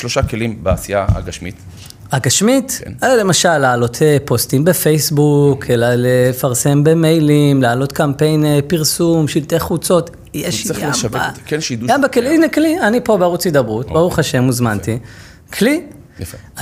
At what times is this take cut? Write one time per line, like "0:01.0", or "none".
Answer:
none